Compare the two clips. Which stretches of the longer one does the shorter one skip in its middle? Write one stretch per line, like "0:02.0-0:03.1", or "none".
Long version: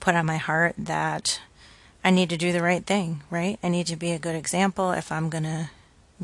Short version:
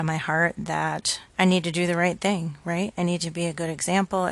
0:01.5-0:02.0